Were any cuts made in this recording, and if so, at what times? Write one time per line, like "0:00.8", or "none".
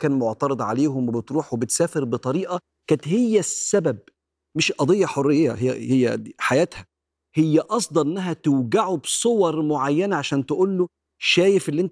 none